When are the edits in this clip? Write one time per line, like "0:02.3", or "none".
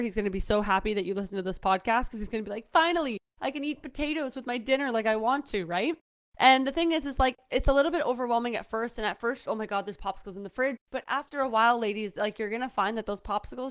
0:09.4
0:10.8